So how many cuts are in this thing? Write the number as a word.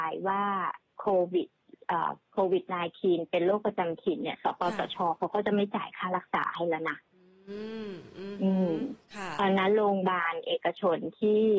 one